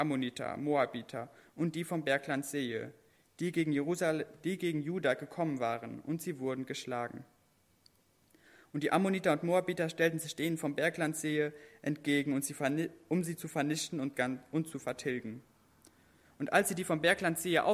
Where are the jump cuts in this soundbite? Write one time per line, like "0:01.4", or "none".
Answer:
none